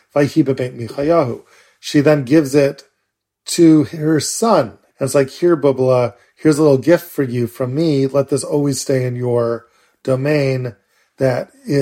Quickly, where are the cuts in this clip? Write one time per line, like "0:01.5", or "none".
none